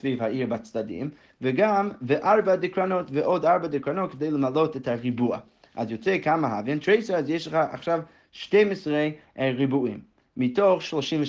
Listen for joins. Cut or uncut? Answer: uncut